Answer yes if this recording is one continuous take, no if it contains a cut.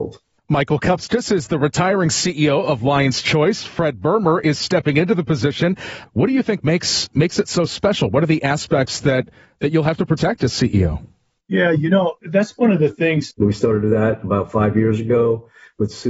no